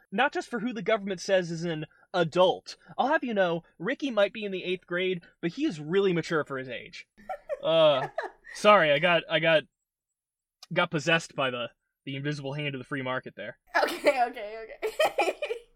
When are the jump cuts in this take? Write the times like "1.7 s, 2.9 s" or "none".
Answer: none